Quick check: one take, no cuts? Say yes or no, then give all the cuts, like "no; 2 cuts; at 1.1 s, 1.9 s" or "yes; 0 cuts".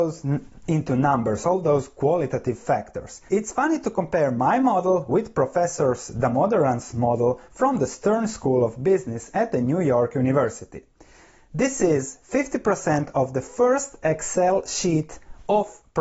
yes; 0 cuts